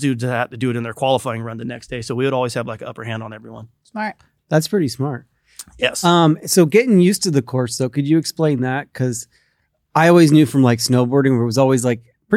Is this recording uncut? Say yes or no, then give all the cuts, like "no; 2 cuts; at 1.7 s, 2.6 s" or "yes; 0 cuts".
yes; 0 cuts